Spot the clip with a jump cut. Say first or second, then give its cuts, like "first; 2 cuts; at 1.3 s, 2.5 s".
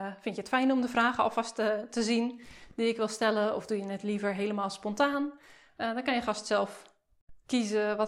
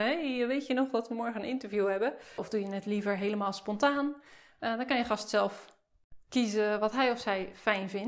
second; 1 cut; at 2.4 s